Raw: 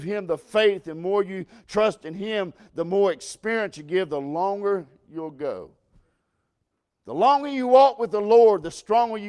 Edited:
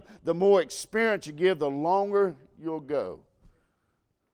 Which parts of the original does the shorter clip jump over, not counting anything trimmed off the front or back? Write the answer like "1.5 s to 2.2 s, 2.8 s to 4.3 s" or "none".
none